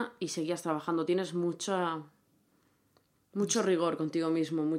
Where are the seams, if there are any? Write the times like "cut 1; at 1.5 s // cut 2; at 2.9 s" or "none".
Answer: none